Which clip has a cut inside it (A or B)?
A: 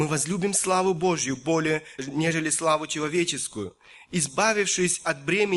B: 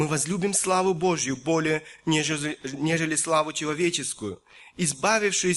A